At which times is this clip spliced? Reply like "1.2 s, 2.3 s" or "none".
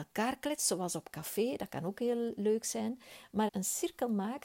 3.5 s

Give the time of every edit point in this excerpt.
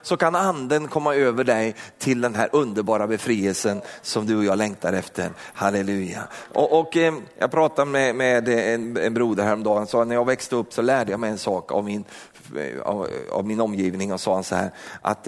none

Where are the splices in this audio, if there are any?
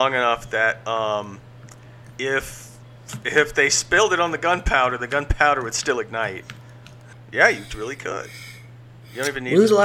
7.1 s

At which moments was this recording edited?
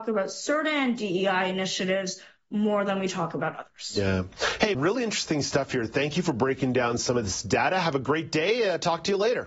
4.7 s

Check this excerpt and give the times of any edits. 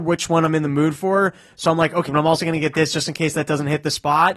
2.1 s

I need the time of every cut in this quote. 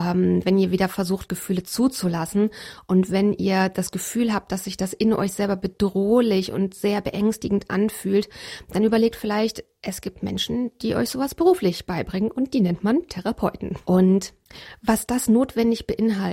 13.8 s

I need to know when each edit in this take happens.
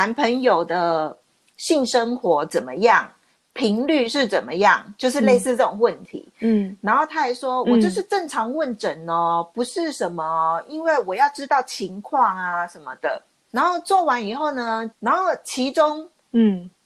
13.5 s, 14.9 s

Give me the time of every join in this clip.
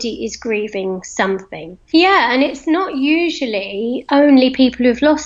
1.9 s

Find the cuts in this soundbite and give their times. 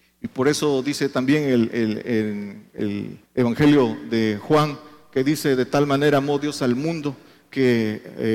3.3 s

